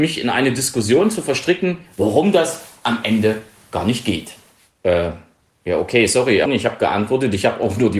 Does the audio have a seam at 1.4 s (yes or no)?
no